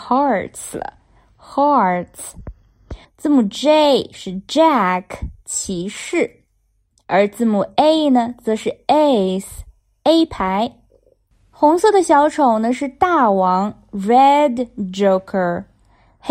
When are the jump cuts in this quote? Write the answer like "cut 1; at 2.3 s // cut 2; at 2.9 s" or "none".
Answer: cut 1; at 3.0 s